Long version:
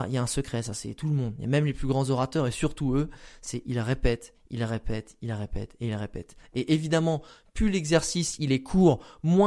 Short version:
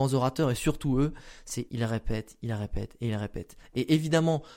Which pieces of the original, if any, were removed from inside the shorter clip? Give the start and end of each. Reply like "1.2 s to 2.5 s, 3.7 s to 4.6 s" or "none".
3.6 s to 4.5 s